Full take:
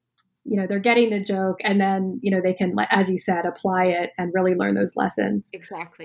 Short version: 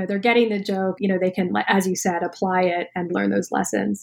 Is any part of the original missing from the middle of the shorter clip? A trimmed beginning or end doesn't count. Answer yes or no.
yes